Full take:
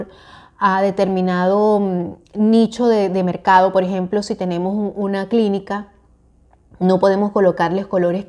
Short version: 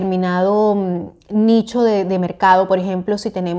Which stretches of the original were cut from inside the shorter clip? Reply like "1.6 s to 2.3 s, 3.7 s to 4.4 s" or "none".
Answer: none